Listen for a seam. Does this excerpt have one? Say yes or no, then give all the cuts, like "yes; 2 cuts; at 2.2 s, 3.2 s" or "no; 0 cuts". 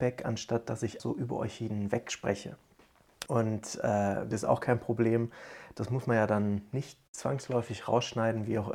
yes; 3 cuts; at 1.0 s, 3.3 s, 4.3 s